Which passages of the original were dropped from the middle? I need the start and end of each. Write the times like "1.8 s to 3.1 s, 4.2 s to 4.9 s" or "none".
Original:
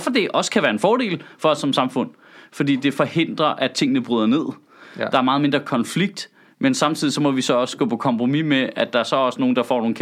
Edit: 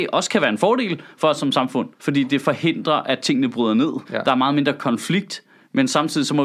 2.2 s to 2.5 s, 4.6 s to 4.9 s